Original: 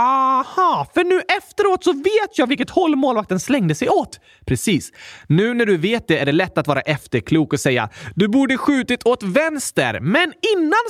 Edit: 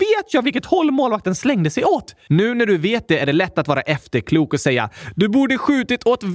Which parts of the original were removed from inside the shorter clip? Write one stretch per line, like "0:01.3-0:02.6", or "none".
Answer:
0:04.3-0:05.3